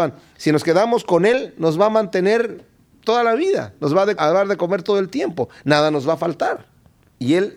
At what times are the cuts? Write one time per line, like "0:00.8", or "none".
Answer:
0:04.2